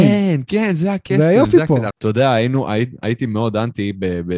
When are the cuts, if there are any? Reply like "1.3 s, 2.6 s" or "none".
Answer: 1.9 s